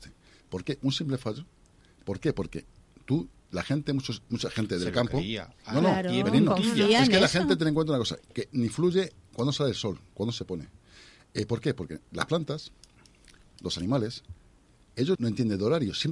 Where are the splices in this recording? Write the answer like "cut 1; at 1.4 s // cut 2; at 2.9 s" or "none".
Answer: cut 1; at 15.2 s